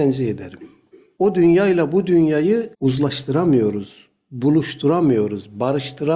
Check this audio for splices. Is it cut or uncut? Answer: cut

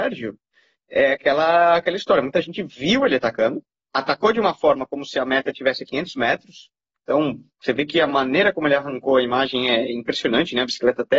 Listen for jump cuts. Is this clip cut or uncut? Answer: uncut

